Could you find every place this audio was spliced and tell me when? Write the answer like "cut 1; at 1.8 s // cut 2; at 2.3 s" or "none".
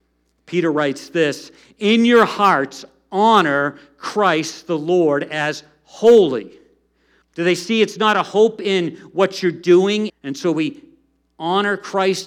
cut 1; at 7.2 s // cut 2; at 10.1 s